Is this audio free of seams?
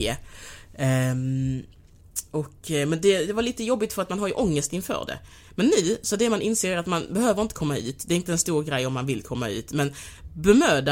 yes; 0 cuts

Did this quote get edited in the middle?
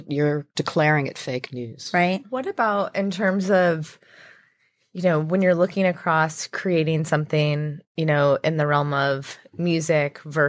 no; 0 cuts

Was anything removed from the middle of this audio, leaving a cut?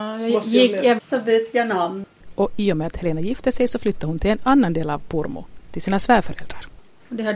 yes; 2 cuts; at 1.0 s, 5.7 s

